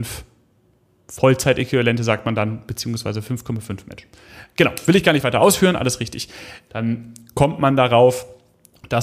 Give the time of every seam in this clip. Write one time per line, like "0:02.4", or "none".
0:06.7